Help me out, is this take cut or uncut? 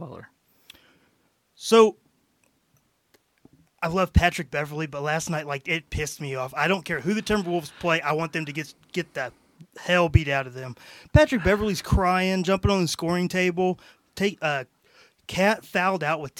uncut